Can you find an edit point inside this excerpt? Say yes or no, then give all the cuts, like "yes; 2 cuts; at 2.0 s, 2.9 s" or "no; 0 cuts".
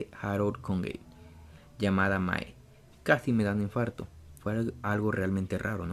yes; 1 cut; at 4.4 s